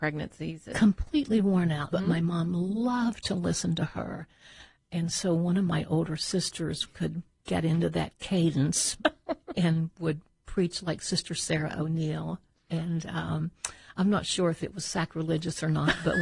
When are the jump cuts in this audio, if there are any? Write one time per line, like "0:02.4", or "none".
0:01.9